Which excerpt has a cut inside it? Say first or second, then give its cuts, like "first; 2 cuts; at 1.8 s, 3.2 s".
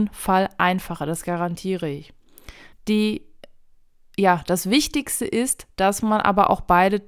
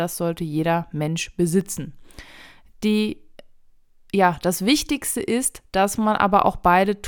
first; 1 cut; at 2.7 s